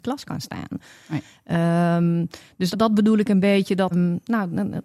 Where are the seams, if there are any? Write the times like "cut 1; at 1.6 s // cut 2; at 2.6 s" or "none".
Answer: cut 1; at 2.7 s // cut 2; at 3.9 s